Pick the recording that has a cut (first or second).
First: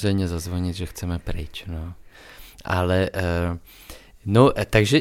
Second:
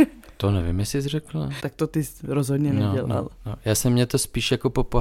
second